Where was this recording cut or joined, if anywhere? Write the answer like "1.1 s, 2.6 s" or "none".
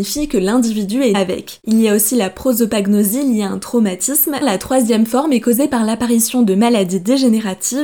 1.1 s, 4.4 s